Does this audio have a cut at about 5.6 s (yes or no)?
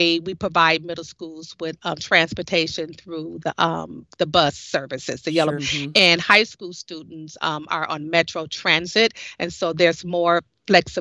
yes